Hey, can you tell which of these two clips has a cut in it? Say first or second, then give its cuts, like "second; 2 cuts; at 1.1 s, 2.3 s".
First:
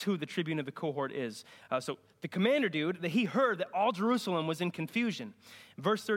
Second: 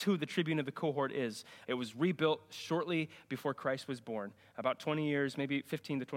second; 1 cut; at 1.6 s